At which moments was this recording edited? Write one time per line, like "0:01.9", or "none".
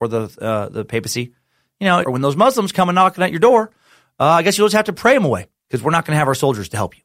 0:02.0